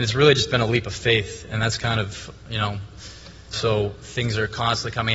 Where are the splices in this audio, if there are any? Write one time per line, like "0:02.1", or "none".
0:03.5